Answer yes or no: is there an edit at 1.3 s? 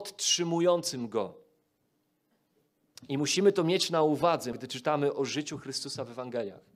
no